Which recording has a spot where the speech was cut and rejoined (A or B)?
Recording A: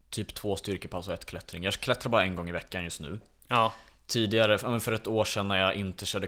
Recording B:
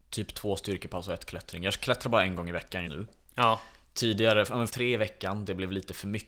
B